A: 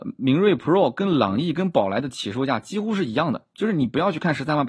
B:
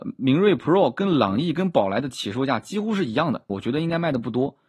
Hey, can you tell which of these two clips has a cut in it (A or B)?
B